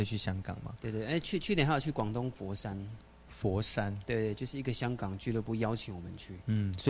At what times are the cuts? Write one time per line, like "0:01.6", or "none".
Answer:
none